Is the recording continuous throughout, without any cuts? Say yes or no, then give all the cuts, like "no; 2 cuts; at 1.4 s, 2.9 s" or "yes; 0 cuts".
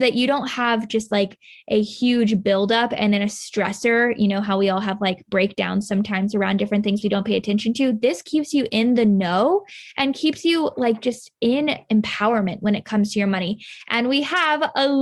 yes; 0 cuts